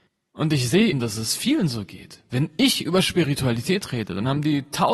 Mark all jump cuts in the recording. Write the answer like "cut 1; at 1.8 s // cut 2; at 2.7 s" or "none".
cut 1; at 0.9 s